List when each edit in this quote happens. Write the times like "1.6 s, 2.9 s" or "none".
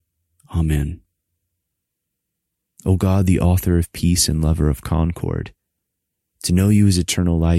none